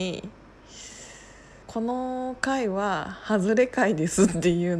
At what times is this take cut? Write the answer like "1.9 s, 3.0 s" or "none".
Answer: 1.6 s